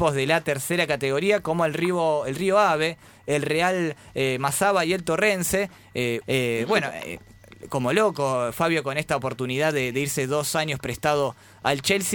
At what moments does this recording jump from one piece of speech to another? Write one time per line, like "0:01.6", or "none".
0:06.2